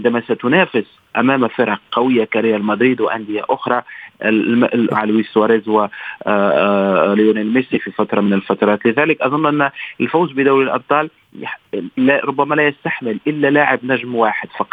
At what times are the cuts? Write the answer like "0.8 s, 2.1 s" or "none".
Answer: 4.9 s